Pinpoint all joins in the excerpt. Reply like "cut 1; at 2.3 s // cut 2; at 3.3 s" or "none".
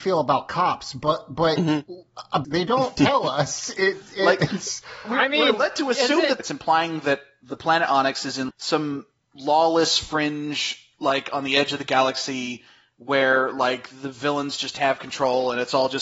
cut 1; at 2.4 s // cut 2; at 6.4 s // cut 3; at 8.5 s